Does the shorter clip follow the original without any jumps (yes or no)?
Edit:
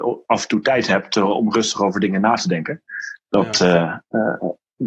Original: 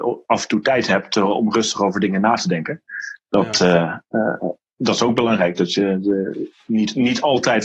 yes